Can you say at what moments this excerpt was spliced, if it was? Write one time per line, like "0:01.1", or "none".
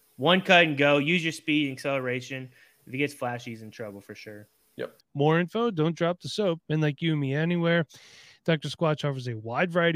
0:05.0
0:06.6